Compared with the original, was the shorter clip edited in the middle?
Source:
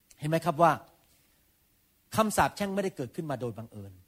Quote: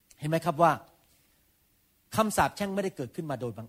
no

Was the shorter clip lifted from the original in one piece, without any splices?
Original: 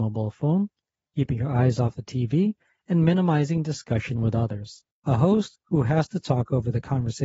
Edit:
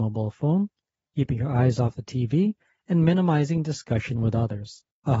yes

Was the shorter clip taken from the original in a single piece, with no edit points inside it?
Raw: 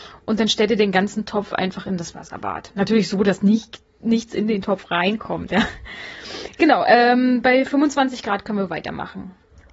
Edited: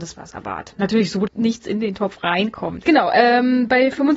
no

